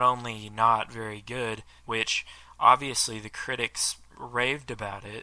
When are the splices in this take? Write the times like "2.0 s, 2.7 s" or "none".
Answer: 1.8 s